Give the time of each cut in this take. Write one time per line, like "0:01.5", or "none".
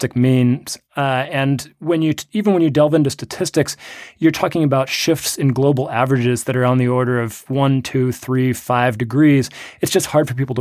none